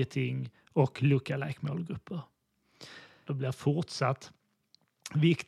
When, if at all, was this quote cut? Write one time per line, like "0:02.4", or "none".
0:03.3